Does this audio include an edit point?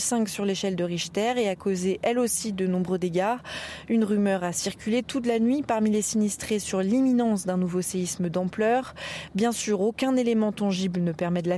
no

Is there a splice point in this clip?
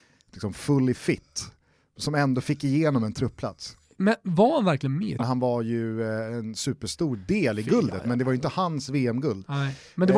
yes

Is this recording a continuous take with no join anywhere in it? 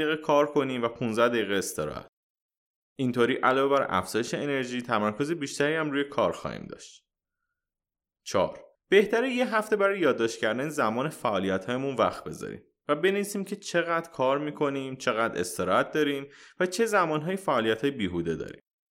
no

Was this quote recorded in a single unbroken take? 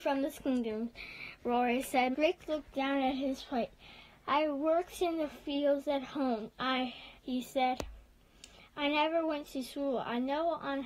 no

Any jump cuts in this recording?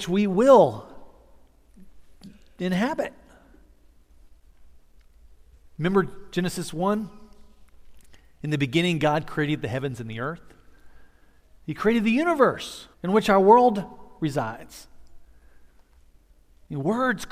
yes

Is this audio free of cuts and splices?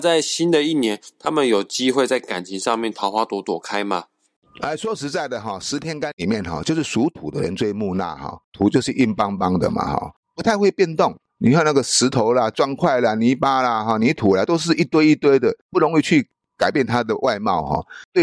yes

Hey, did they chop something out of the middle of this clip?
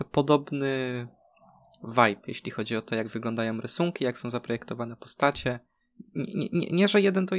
no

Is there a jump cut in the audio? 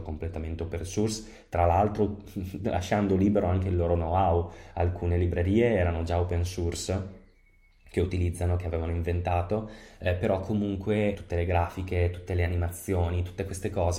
yes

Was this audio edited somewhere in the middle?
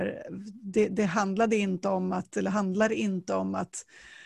no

